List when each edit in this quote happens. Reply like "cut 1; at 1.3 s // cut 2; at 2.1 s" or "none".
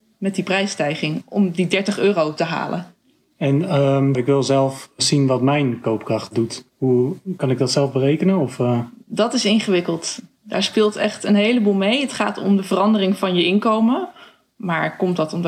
cut 1; at 4.1 s // cut 2; at 6.7 s